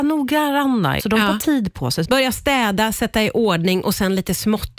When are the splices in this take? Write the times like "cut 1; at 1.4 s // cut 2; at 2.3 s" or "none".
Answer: cut 1; at 1.0 s // cut 2; at 2.0 s